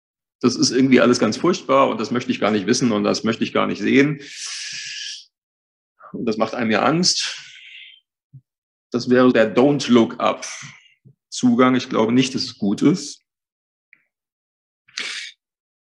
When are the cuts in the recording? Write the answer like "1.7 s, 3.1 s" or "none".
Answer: 9.3 s